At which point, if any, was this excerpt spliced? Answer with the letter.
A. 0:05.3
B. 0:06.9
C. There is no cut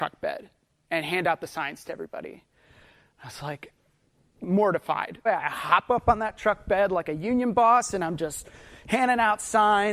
A